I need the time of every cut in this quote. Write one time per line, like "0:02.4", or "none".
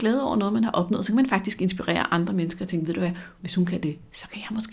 0:03.4